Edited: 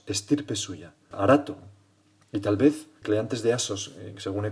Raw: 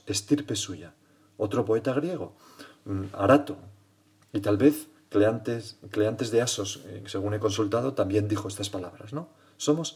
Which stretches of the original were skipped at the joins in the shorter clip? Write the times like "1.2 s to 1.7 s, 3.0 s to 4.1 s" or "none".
1.1 s to 3.1 s, 5.0 s to 5.9 s